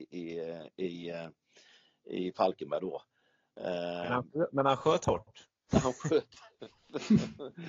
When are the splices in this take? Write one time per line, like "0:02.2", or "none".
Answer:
none